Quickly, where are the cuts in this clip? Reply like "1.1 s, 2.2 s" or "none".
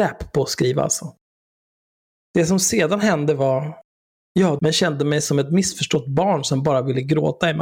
4.6 s

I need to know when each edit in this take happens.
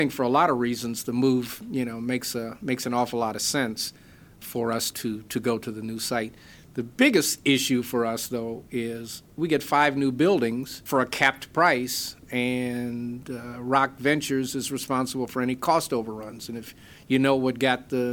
none

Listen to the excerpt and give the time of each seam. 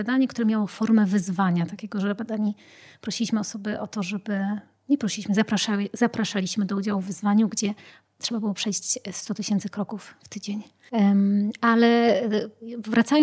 10.9 s

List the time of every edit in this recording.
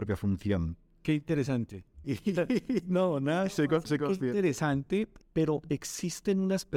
2.0 s, 5.2 s

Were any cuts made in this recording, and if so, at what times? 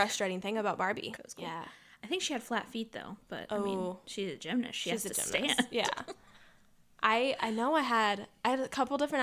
1.2 s

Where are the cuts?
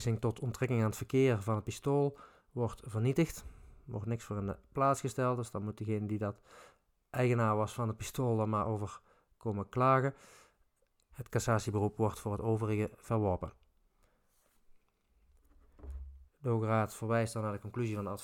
11.1 s, 16.2 s

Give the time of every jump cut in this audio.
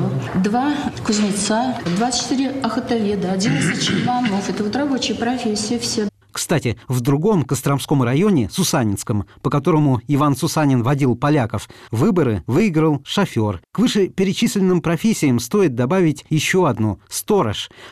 none

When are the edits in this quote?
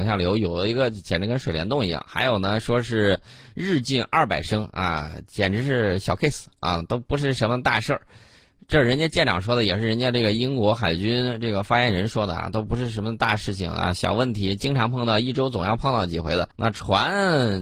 16.5 s

